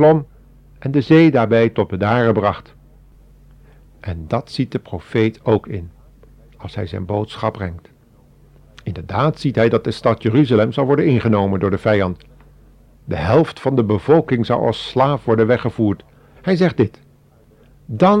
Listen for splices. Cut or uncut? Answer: cut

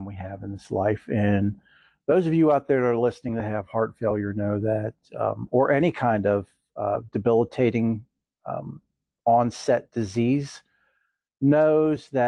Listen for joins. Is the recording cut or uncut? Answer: uncut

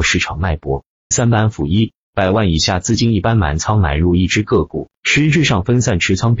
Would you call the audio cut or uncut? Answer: cut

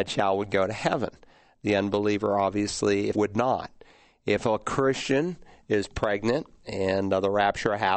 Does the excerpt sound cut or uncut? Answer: cut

